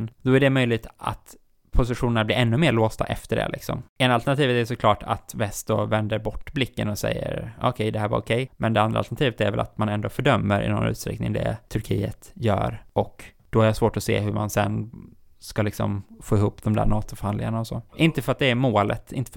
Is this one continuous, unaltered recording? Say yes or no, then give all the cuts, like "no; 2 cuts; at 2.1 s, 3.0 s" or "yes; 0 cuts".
yes; 0 cuts